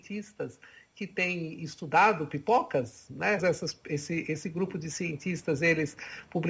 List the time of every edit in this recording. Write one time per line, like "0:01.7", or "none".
0:03.4